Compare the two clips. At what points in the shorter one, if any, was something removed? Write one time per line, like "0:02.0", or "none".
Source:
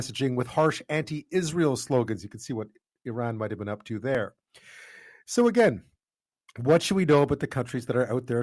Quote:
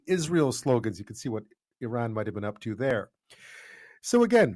none